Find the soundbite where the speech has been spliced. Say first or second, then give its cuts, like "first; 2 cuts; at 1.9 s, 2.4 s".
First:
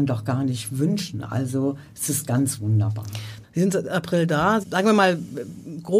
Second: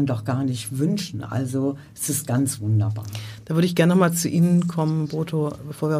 first; 2 cuts; at 3.4 s, 4.6 s